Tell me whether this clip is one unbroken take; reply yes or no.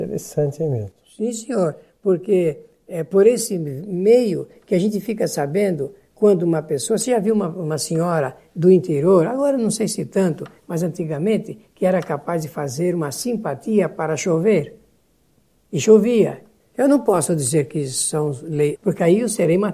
no